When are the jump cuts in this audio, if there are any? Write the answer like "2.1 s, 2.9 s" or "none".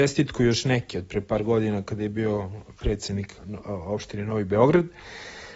3.4 s